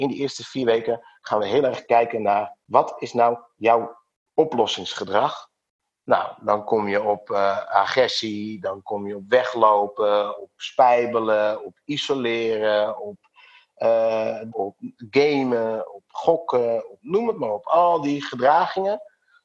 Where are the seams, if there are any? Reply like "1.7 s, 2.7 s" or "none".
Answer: 14.5 s